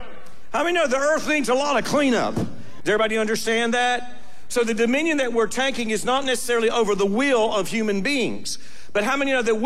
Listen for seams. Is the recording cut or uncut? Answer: cut